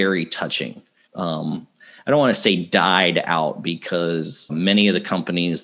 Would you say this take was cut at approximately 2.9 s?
no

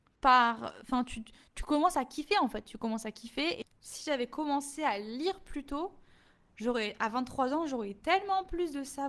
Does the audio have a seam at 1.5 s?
yes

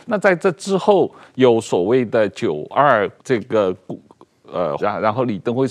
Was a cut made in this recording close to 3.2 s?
yes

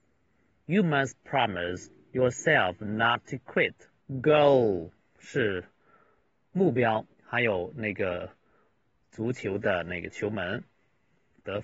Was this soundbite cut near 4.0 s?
yes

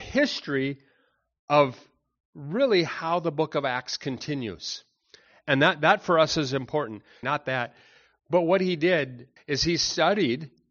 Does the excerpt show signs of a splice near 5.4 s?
no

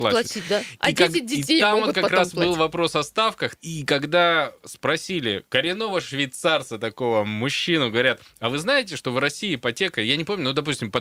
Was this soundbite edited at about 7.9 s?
no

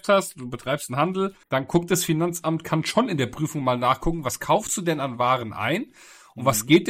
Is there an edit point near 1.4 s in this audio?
yes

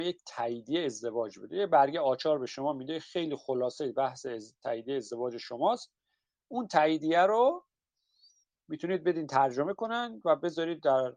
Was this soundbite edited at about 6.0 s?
no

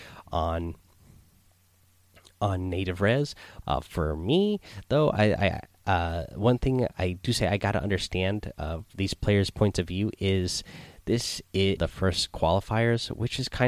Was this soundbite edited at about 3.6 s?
yes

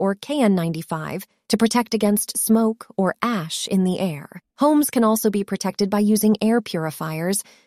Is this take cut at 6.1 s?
no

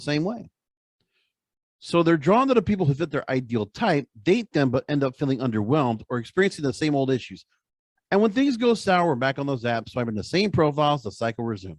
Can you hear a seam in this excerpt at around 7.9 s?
no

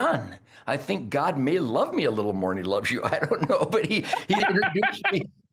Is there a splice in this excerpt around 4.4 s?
yes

